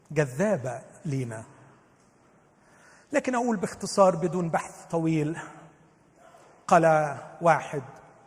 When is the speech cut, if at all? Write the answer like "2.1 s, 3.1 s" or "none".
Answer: none

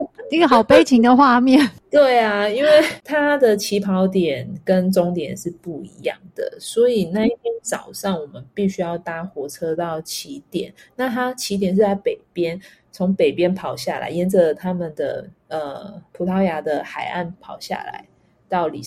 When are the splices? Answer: 17.3 s

